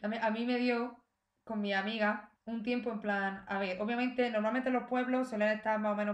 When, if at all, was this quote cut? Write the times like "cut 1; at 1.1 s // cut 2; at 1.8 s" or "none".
cut 1; at 2.4 s